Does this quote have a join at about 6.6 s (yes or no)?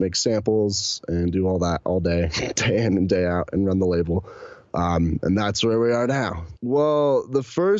yes